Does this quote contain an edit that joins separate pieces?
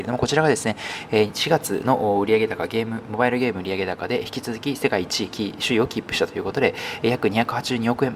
no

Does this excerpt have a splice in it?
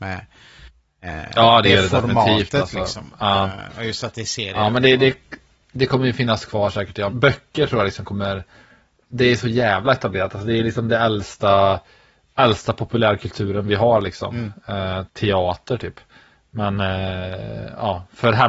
yes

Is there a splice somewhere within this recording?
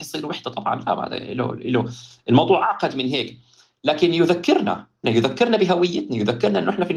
yes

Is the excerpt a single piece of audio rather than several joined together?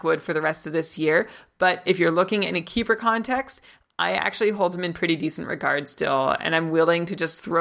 yes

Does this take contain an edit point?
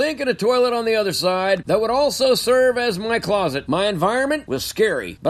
yes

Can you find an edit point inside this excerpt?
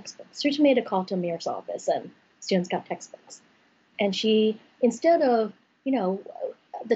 yes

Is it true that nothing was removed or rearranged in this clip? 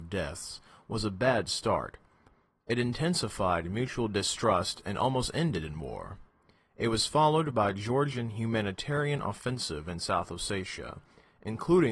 yes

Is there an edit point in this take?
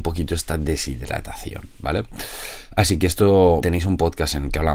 yes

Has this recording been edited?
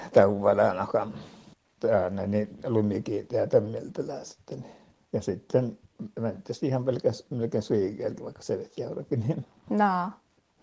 yes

